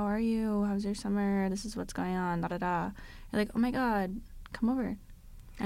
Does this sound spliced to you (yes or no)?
yes